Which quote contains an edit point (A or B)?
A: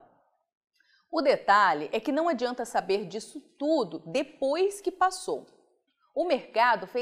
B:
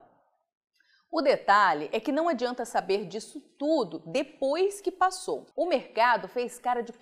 B